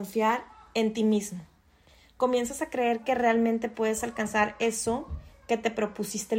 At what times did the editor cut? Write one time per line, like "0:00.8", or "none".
none